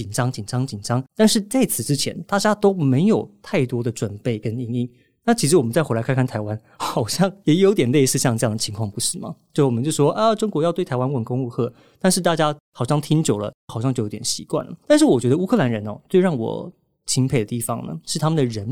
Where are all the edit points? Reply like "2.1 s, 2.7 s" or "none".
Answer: 1.1 s